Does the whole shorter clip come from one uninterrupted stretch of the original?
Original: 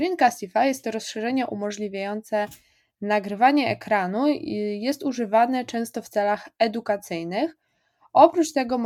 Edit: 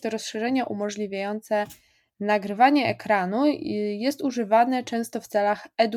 yes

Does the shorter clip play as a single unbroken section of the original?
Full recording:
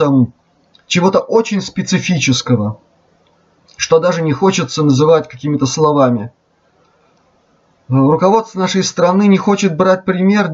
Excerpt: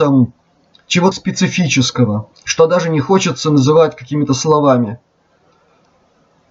no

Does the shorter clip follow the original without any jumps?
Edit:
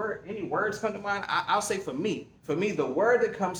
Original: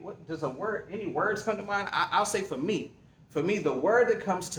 no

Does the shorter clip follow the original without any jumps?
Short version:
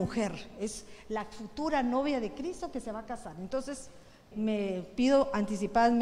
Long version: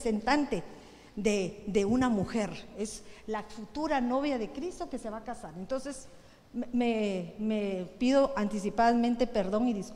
no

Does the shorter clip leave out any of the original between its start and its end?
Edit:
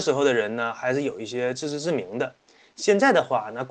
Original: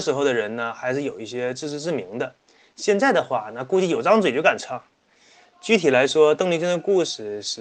no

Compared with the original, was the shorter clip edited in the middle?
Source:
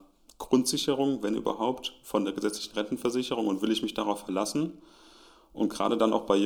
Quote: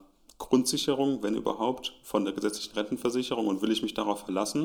no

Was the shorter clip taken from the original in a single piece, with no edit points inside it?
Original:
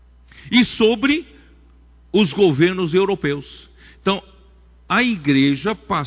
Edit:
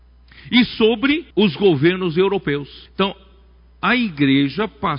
no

